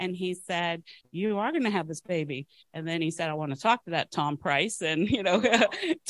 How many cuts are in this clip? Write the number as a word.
one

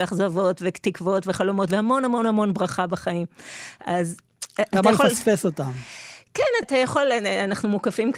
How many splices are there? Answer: one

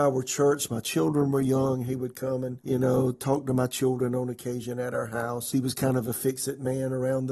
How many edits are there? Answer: two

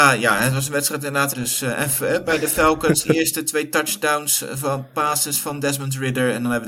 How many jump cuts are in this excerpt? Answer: one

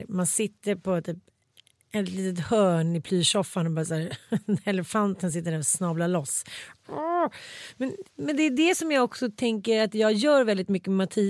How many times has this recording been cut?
one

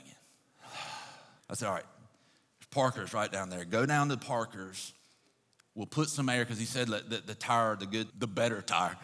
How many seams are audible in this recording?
two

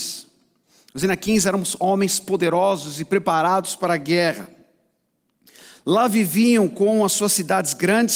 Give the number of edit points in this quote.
zero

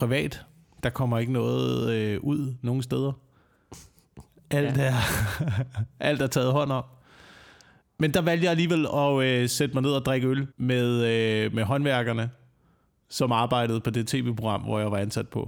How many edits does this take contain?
two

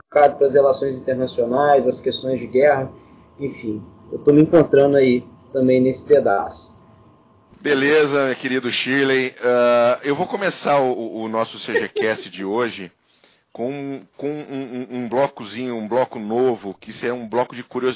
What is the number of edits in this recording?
one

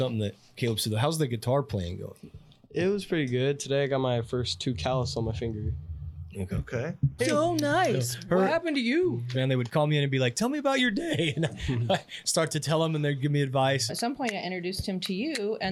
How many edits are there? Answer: three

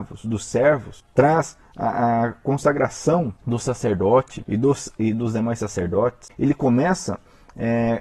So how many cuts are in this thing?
one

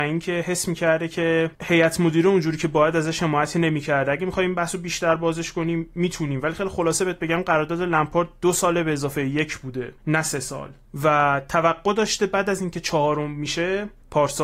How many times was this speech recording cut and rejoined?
zero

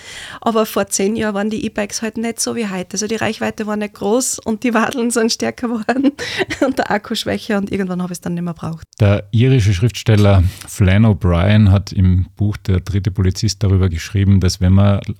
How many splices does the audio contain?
two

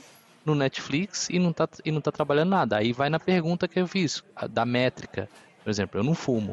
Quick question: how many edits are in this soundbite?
zero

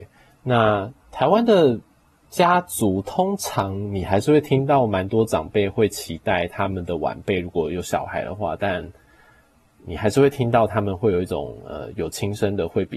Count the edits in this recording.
zero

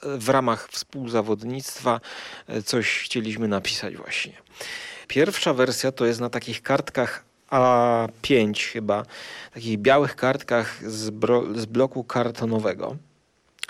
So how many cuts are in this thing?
one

